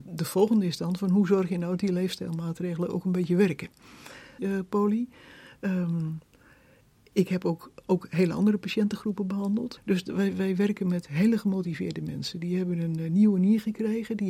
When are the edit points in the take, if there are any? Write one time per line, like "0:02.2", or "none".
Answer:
0:04.4
0:09.8